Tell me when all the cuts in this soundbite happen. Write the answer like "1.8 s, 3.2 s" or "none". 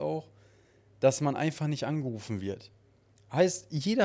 3.1 s